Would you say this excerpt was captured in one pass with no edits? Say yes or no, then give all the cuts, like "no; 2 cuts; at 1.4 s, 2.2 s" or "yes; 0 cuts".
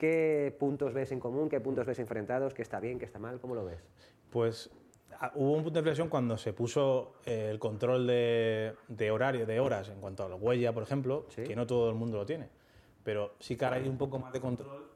yes; 0 cuts